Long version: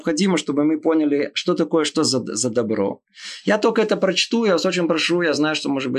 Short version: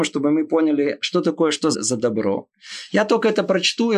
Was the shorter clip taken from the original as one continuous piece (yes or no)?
no